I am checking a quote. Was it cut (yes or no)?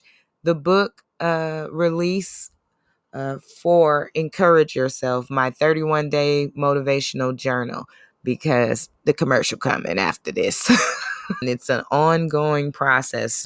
yes